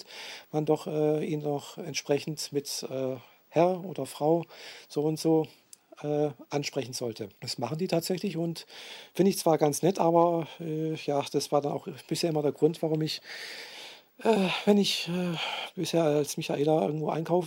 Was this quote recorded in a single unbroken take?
no; 1 cut; at 7.4 s

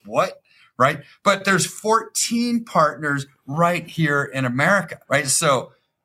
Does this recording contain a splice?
yes; 1 cut; at 5.0 s

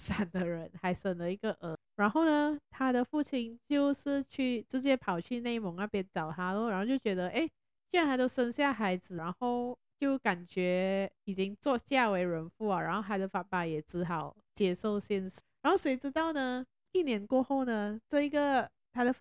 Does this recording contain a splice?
no; 0 cuts

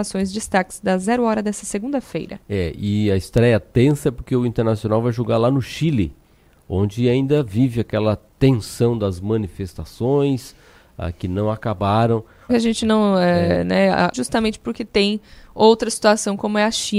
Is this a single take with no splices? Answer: no; 2 cuts; at 12.5 s, 14.1 s

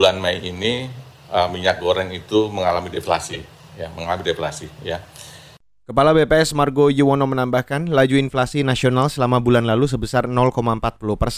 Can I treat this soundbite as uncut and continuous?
yes; 0 cuts

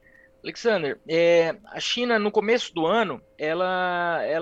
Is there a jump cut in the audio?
no; 0 cuts

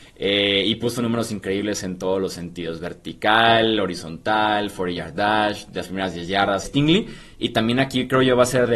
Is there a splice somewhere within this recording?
yes; 1 cut; at 6.6 s

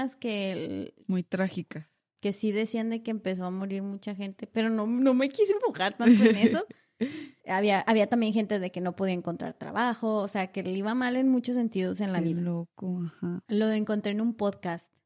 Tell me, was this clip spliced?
no; 0 cuts

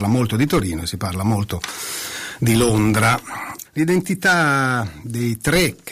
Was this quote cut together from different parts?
yes; 1 cut; at 3.6 s

